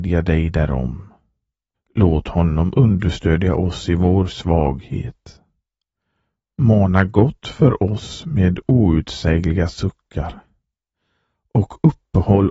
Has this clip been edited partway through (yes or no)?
yes